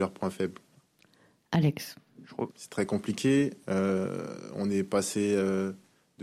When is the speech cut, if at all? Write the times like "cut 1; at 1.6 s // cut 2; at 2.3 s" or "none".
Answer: cut 1; at 2.5 s